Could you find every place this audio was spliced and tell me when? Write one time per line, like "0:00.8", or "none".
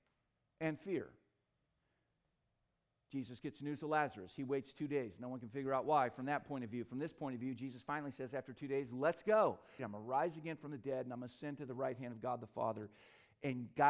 0:09.8